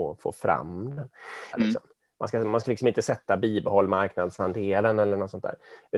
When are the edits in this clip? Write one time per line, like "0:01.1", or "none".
0:01.5

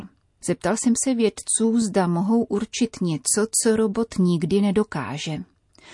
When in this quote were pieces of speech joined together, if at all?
none

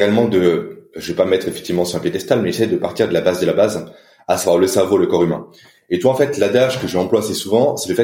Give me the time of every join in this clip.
none

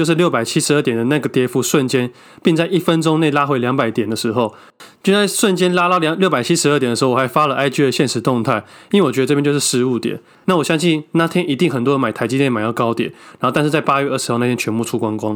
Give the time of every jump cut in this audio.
0:10.4

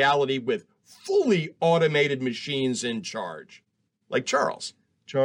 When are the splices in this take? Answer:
none

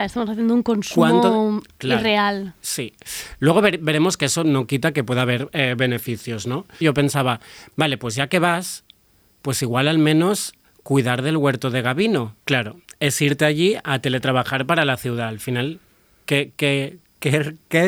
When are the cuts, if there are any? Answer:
0:06.8
0:12.4

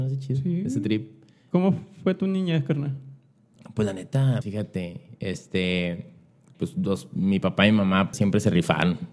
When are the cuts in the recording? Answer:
0:04.4
0:08.1

